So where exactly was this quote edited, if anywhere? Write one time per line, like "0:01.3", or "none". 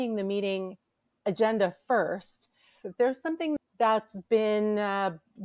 0:02.8